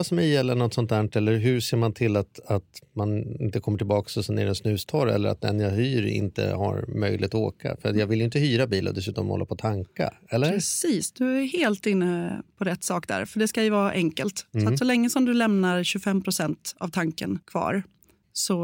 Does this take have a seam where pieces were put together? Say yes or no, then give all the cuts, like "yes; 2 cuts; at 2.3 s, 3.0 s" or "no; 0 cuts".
yes; 1 cut; at 17.4 s